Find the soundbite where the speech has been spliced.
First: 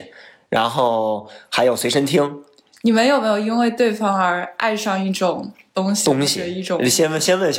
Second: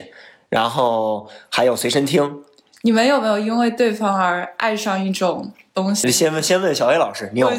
second; 1 cut; at 6.0 s

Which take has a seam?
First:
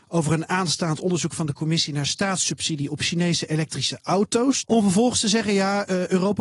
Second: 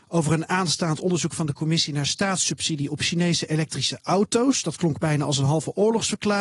first; 1 cut; at 4.6 s

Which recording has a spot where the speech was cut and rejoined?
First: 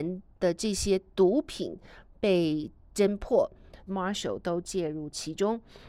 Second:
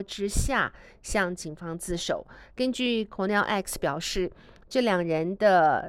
first; 1 cut; at 3.9 s

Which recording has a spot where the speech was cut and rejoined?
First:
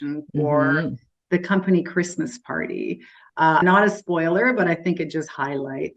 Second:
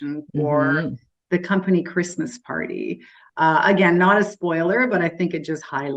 first; 1 cut; at 3.6 s

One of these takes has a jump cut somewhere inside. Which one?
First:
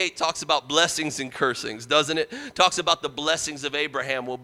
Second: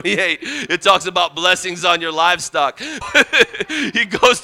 second; 1 cut; at 3.0 s

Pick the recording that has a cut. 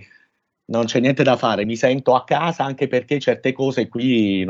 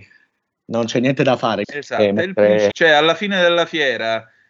second; 2 cuts; at 1.6 s, 2.7 s

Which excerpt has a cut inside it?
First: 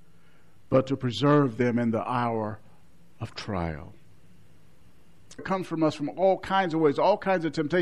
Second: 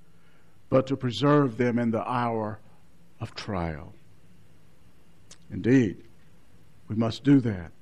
first; 1 cut; at 5.4 s

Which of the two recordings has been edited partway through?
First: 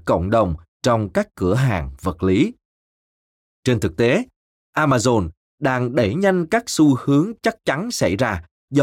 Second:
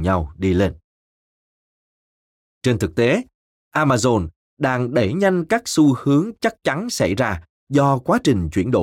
second; 1 cut; at 2.5 s

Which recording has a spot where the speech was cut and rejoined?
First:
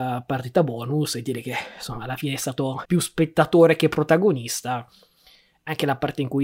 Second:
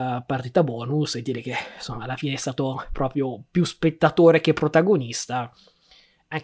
first; 1 cut; at 2.9 s

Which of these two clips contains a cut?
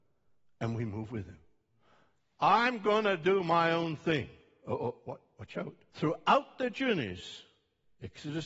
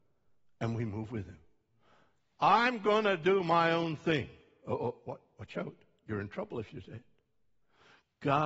first; 1 cut; at 5.9 s

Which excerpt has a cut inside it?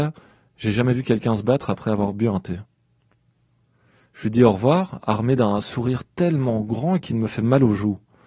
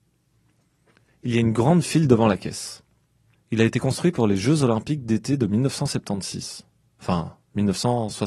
second; 1 cut; at 3.4 s

